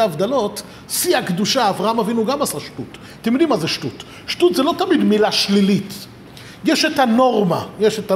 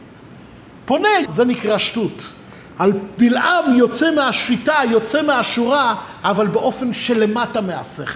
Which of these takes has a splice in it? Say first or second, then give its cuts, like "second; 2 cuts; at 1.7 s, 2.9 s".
second; 1 cut; at 1.3 s